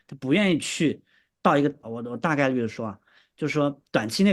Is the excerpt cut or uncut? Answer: cut